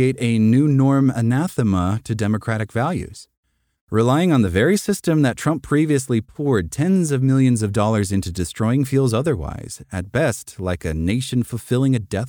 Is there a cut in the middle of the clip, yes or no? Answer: yes